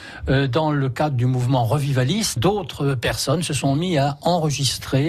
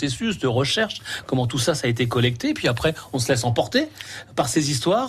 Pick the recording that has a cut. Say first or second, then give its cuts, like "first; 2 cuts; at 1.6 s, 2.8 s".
first; 1 cut; at 2.4 s